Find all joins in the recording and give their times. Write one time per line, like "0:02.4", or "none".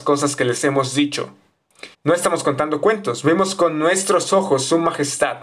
0:01.9